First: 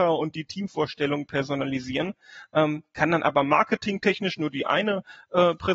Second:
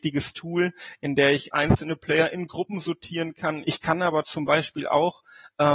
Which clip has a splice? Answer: second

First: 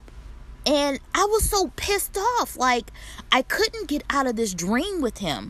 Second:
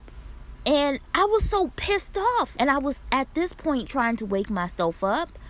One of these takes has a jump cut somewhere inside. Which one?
second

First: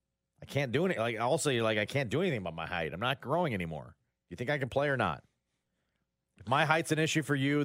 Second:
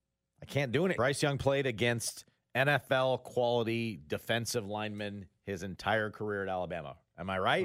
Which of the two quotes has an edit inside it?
second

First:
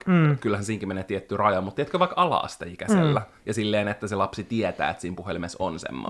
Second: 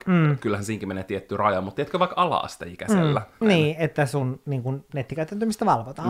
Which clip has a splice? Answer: second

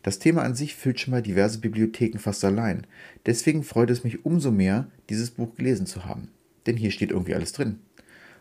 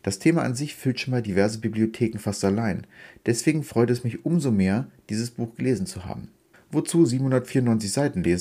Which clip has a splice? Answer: second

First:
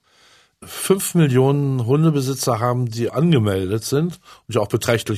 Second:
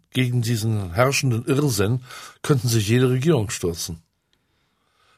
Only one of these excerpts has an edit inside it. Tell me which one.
first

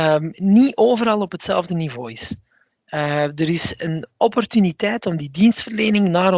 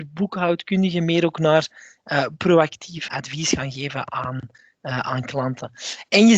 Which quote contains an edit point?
second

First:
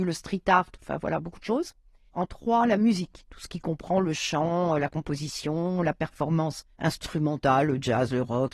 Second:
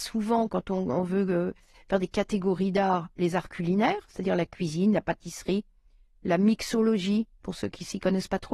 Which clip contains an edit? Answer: first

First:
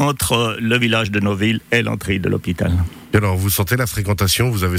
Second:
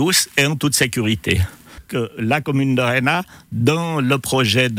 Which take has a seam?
second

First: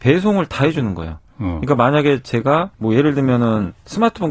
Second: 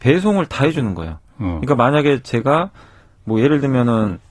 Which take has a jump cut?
first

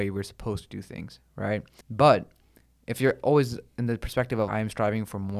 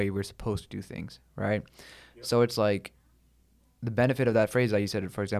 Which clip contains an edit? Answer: first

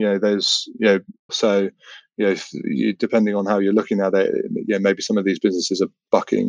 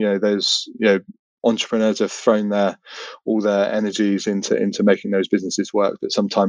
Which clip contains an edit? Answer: first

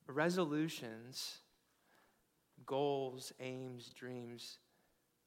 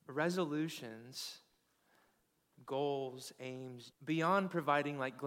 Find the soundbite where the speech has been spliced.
second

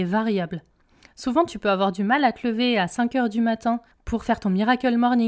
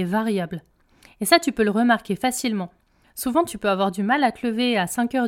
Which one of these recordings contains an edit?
first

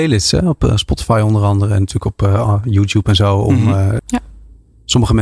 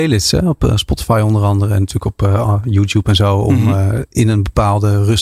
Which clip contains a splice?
first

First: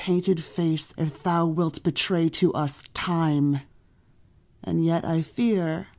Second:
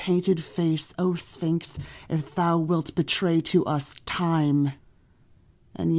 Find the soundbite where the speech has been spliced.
first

